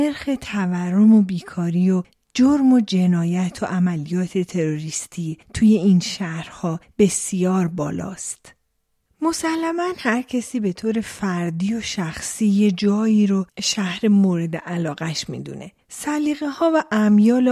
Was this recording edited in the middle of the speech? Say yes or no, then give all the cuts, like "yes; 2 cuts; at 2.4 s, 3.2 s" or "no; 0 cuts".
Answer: yes; 2 cuts; at 9.1 s, 15.8 s